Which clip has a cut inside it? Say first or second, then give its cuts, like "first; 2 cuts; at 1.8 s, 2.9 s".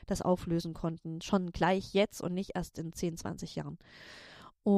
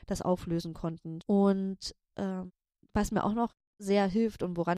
second; 1 cut; at 1.2 s